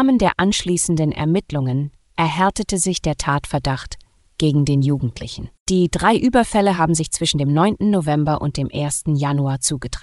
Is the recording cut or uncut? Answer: uncut